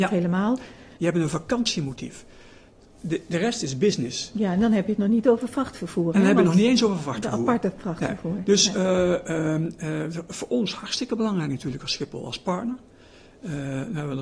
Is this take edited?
yes; 1 cut; at 1.0 s

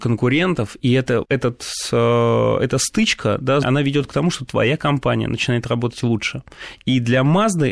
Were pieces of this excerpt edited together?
yes; 2 cuts; at 1.2 s, 3.6 s

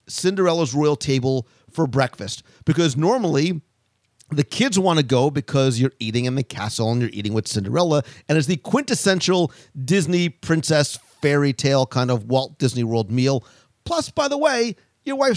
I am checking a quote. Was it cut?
no; 0 cuts

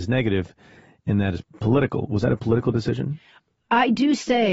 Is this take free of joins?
yes; 0 cuts

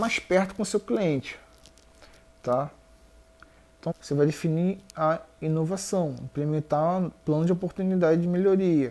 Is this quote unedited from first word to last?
no; 1 cut; at 3.9 s

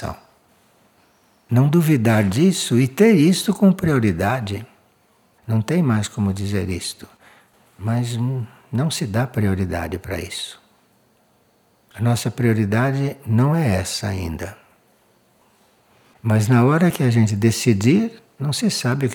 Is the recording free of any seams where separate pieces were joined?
no; 1 cut; at 5.4 s

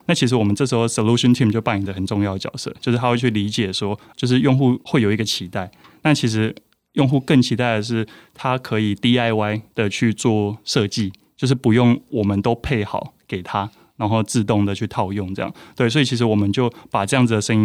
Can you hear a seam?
no; 0 cuts

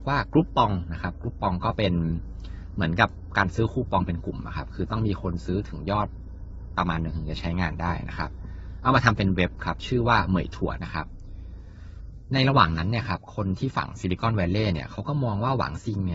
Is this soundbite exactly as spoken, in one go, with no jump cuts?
no; 1 cut; at 10.8 s

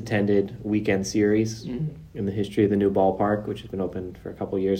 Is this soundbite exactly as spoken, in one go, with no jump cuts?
yes; 0 cuts

